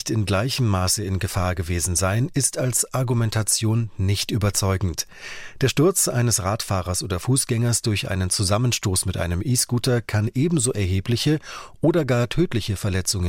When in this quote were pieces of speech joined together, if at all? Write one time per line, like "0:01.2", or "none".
none